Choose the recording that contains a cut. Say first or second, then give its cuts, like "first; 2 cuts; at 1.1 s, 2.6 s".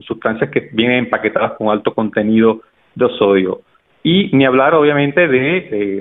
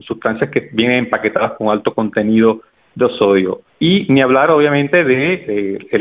second; 1 cut; at 3.7 s